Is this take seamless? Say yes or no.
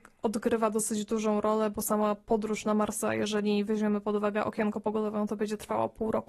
yes